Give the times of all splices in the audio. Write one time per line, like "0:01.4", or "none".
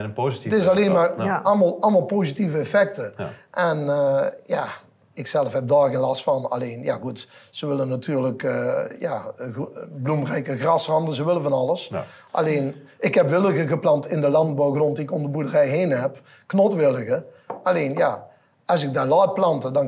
none